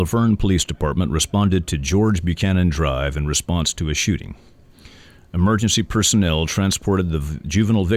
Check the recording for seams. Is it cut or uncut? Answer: uncut